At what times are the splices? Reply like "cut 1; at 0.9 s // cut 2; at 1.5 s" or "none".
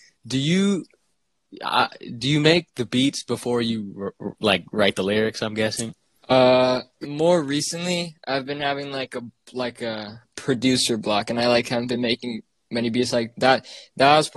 cut 1; at 7.0 s